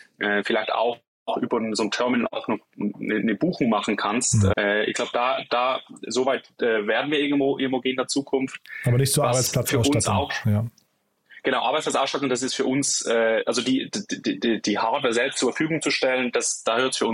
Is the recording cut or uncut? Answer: cut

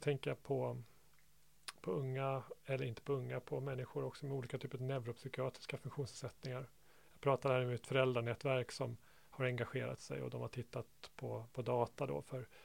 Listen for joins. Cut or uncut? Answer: uncut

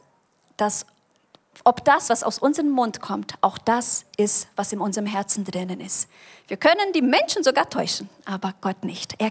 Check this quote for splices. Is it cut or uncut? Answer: uncut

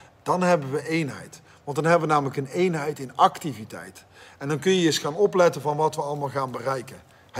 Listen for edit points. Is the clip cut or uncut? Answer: uncut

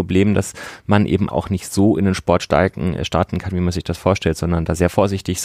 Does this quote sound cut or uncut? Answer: cut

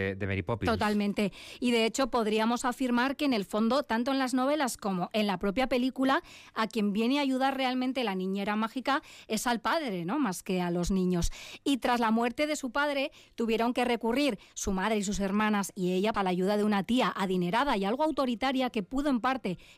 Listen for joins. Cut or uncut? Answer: cut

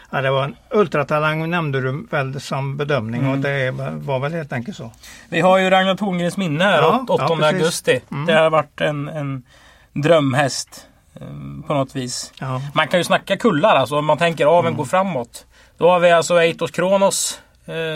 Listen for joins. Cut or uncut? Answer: uncut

